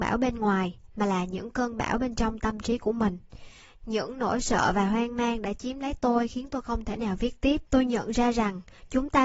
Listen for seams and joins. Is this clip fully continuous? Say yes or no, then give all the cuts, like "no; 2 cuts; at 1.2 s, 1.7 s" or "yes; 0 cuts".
no; 1 cut; at 7.7 s